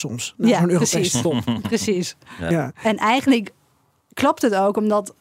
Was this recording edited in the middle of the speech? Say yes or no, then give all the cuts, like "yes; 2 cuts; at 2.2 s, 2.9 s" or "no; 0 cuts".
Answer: no; 0 cuts